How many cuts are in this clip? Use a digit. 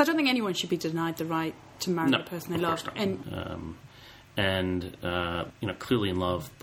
2